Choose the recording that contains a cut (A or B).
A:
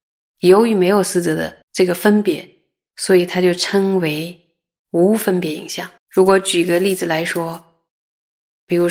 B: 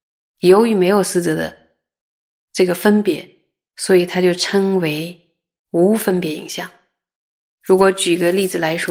A